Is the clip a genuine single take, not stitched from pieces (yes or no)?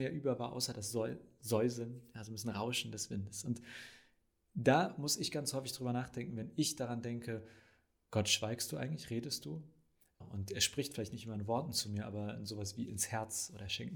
no